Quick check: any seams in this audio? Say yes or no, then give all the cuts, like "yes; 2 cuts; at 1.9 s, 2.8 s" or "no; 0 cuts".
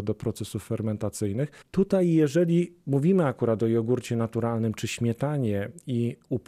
no; 0 cuts